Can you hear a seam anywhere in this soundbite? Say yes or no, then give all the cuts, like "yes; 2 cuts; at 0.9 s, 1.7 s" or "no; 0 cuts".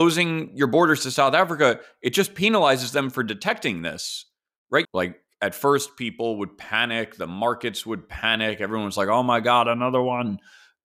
yes; 1 cut; at 4.8 s